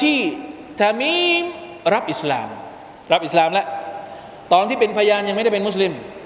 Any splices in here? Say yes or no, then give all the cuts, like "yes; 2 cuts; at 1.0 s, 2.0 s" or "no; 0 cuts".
yes; 1 cut; at 3.0 s